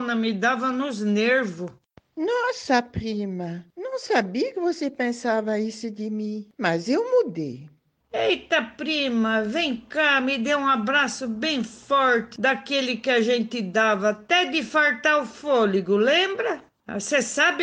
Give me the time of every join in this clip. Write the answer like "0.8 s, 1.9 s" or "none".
none